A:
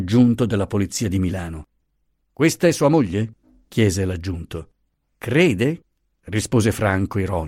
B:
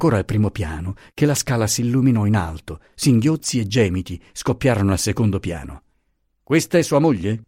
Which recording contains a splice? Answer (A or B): A